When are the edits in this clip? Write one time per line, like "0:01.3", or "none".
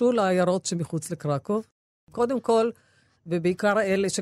0:03.2